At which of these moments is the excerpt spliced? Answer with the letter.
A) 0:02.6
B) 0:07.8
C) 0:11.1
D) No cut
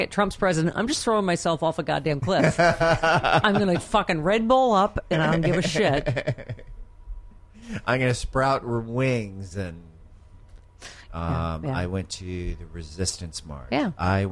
C